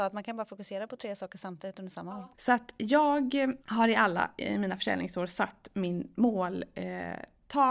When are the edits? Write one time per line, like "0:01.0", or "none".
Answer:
0:02.3
0:03.6